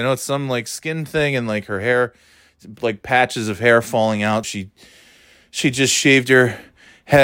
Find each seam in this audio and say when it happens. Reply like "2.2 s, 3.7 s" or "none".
4.4 s